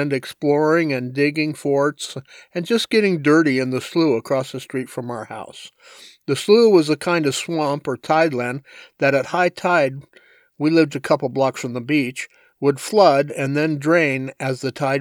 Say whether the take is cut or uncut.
cut